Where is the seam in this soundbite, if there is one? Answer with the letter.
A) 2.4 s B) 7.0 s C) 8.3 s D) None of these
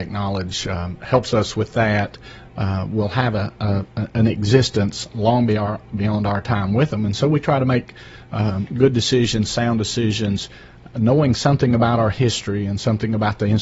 A